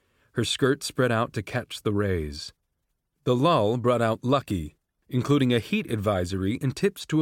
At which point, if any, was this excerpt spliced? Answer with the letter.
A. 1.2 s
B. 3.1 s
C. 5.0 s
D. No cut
C